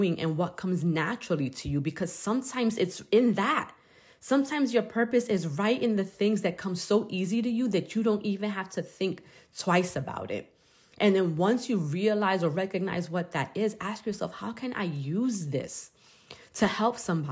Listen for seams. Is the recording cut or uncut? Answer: uncut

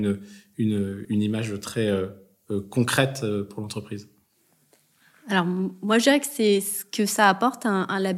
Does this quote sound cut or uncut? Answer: cut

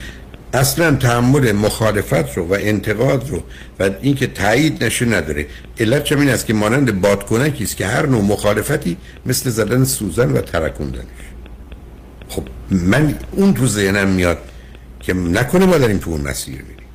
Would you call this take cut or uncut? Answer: cut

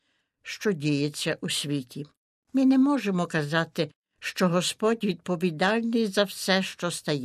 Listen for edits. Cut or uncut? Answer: uncut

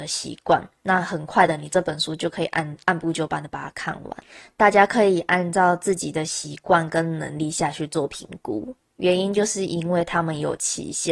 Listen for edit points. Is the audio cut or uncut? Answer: cut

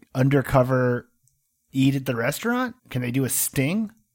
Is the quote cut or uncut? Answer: cut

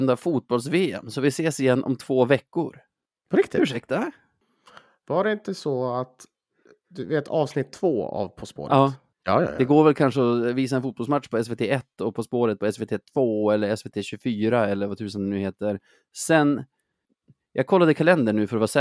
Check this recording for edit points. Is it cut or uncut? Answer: cut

